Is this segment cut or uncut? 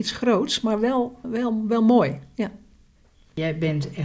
cut